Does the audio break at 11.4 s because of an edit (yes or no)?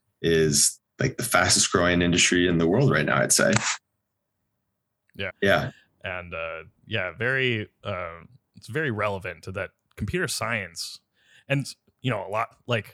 no